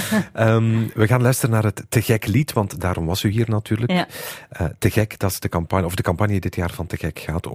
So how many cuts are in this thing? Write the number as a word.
zero